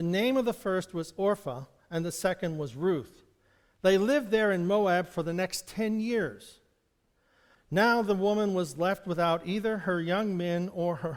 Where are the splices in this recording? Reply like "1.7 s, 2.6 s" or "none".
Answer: 7.5 s

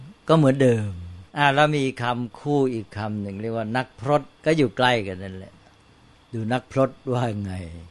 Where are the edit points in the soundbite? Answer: 1.3 s, 4.3 s

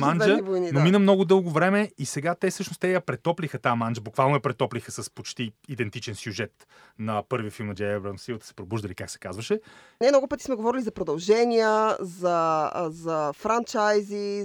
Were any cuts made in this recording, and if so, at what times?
7.8 s, 10.0 s

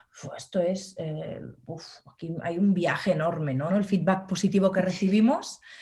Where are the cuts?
3.7 s

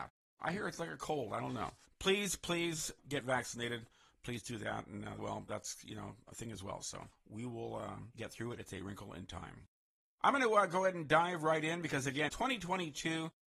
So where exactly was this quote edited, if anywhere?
5.2 s, 12.3 s

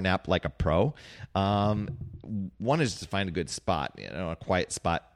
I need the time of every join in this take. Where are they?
none

